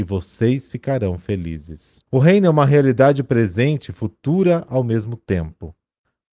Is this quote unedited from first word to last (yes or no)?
no